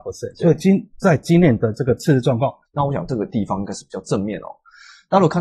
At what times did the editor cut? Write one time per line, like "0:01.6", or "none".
0:02.7